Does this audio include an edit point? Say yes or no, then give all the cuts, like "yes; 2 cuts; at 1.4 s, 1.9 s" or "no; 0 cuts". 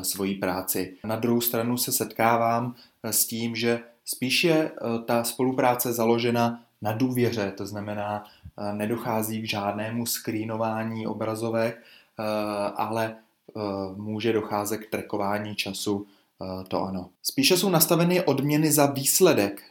yes; 2 cuts; at 1.0 s, 17.2 s